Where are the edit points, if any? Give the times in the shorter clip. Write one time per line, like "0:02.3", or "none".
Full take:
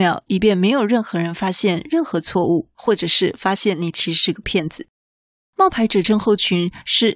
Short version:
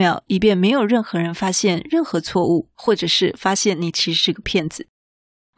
none